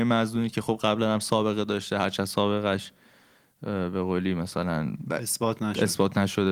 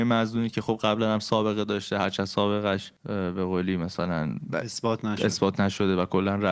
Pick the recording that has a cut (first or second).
second